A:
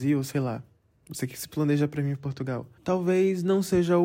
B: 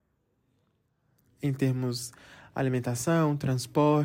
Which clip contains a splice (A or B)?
A